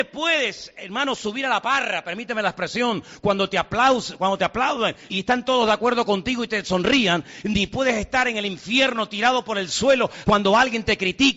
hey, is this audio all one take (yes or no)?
no